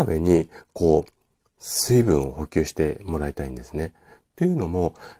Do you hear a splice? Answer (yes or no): no